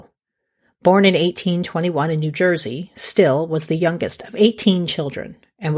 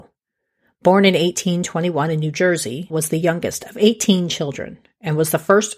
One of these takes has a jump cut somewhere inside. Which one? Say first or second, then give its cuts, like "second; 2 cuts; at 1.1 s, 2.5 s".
second; 1 cut; at 2.9 s